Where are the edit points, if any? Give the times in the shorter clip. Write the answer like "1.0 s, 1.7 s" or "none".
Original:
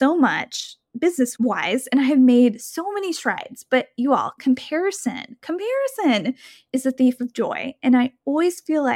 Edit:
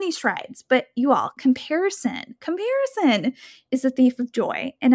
none